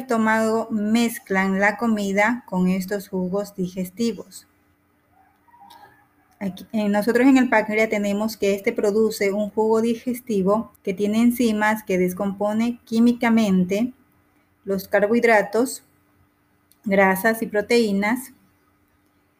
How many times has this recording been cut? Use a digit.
1